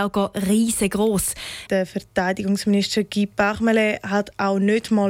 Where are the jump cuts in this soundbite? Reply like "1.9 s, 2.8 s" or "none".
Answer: 1.7 s